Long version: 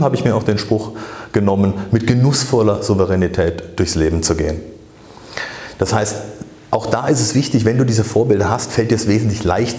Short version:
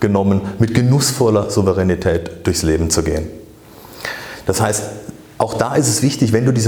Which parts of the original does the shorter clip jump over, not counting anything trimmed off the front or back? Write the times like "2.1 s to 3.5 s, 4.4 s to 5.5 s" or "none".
none